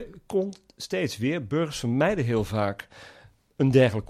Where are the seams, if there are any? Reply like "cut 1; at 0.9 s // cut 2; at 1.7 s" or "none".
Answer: none

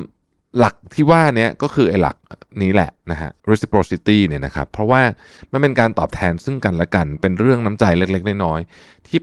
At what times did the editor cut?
cut 1; at 3.4 s

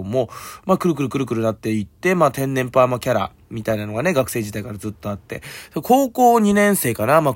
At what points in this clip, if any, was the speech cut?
none

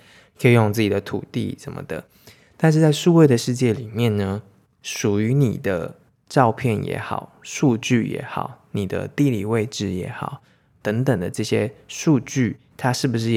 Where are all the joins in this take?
none

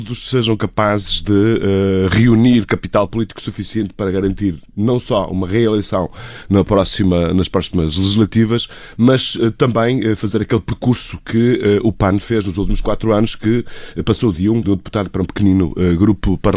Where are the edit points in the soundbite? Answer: cut 1; at 14.6 s

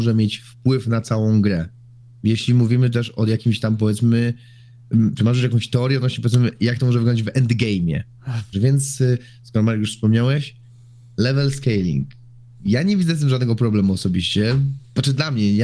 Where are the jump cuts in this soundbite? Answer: cut 1; at 8.5 s

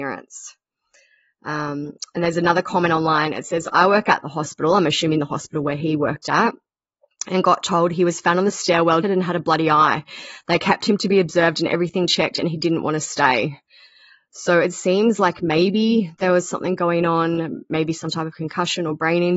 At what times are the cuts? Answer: cut 1; at 9.0 s

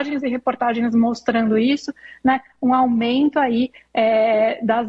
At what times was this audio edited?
none

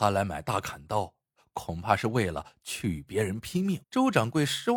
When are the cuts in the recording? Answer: cut 1; at 3.8 s

